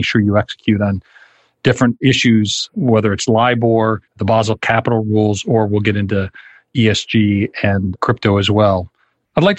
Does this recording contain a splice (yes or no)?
yes